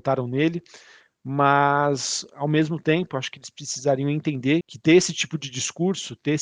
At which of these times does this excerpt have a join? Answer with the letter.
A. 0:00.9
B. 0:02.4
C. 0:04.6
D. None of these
C